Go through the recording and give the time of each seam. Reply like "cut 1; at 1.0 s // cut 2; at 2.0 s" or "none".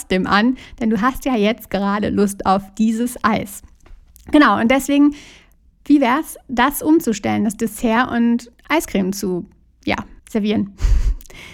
cut 1; at 10.2 s